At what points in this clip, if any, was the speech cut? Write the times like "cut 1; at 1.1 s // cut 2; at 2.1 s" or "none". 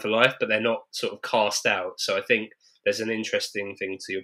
none